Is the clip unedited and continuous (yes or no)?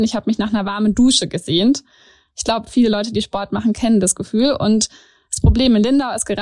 yes